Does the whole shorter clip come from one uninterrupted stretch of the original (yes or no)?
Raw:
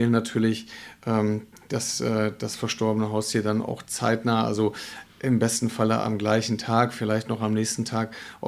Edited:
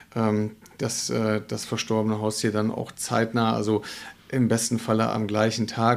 yes